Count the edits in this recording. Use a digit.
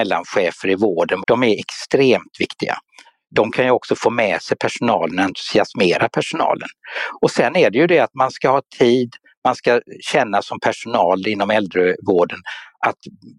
1